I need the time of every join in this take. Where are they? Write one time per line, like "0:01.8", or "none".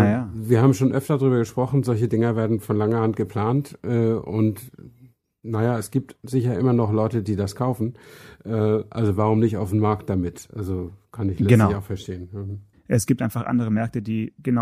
0:12.7